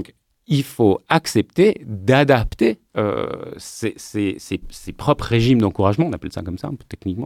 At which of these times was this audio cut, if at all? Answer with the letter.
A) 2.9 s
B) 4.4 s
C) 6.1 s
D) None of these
A